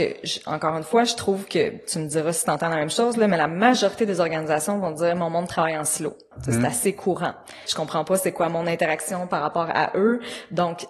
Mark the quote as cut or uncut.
cut